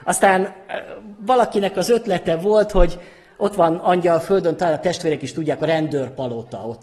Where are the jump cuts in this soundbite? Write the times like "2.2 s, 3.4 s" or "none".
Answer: none